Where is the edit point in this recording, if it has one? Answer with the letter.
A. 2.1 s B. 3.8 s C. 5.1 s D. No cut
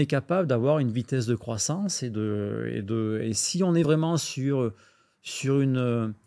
D